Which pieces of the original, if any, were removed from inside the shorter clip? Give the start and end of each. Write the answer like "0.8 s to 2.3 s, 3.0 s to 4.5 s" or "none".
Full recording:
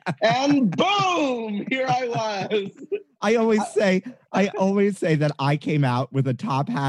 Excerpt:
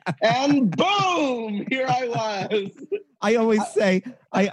none